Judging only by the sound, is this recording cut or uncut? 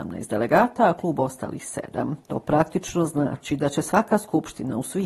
cut